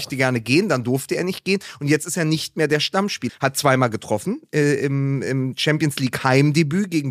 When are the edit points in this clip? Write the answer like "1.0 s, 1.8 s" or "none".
3.3 s